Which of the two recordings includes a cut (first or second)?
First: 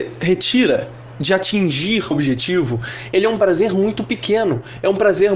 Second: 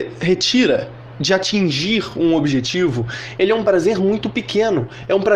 first